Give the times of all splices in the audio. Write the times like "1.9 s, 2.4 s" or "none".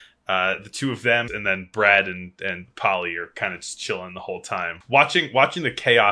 1.3 s, 4.8 s